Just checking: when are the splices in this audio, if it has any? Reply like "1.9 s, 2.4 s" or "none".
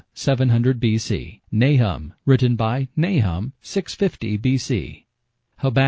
1.4 s